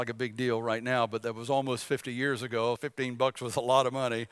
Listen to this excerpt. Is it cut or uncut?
cut